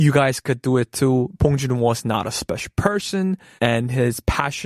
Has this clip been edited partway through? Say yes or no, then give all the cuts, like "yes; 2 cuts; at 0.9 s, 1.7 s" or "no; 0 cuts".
yes; 1 cut; at 3.6 s